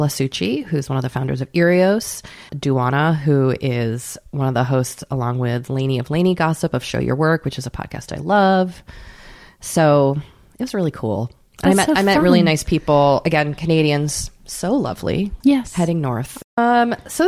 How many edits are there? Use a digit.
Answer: 2